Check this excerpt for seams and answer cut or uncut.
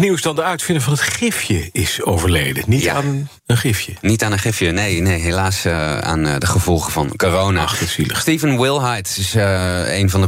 cut